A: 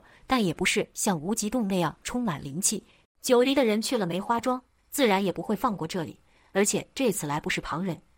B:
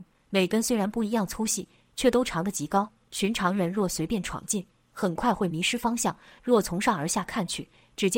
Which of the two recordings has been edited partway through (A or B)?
A